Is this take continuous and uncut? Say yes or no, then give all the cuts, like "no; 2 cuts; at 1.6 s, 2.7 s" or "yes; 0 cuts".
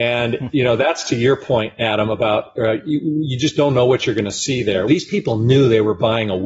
no; 1 cut; at 4.9 s